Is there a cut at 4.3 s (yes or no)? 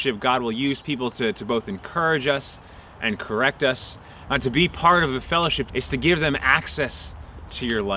yes